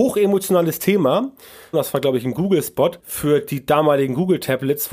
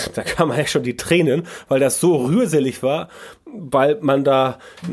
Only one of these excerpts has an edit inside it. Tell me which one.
first; 2 cuts; at 1.7 s, 3.0 s

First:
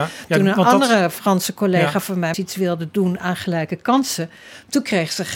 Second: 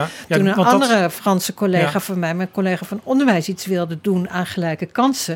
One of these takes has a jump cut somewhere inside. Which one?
first; 1 cut; at 2.3 s

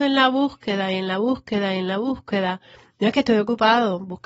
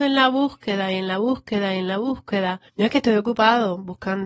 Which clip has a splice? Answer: second; 1 cut; at 2.7 s

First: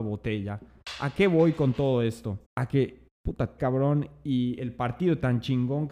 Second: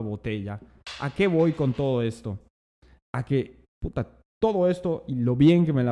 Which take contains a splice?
first; 2 cuts; at 2.4 s, 3.6 s

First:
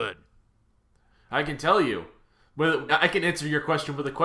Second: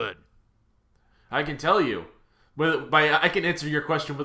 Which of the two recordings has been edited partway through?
first; 1 cut; at 2.9 s

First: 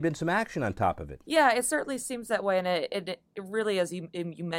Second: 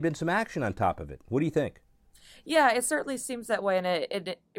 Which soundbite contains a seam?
first; 1 cut; at 1.2 s

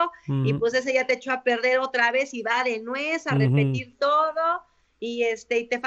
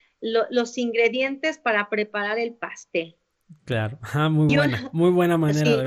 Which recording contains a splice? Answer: second; 1 cut; at 4.5 s

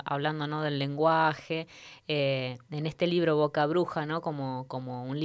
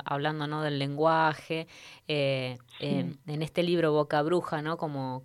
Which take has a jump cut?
first; 1 cut; at 2.7 s

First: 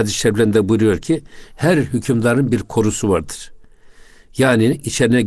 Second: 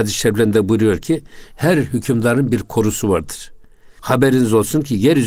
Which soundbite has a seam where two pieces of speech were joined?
second; 1 cut; at 4.0 s

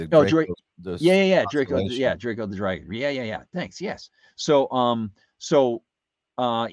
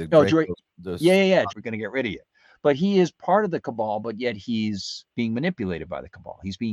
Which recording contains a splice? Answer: second; 2 cuts; at 1.5 s, 5.1 s

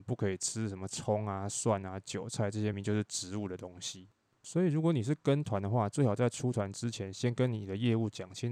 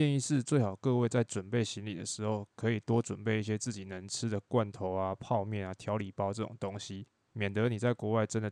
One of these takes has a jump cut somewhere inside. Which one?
first; 1 cut; at 2.7 s

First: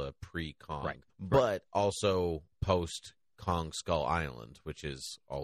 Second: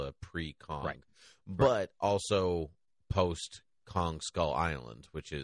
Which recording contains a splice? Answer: first; 2 cuts; at 1.1 s, 2.5 s

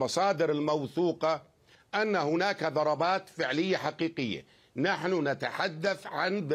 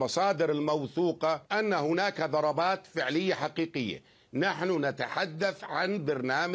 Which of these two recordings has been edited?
second; 1 cut; at 1.5 s

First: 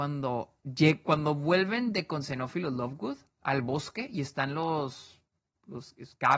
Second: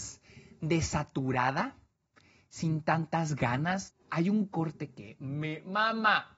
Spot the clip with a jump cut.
second; 1 cut; at 3.9 s

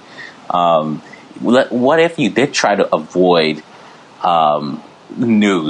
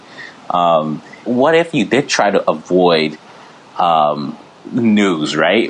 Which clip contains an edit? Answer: second; 1 cut; at 1.2 s

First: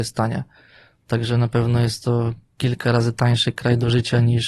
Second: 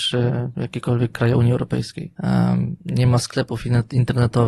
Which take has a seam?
second; 1 cut; at 2.2 s

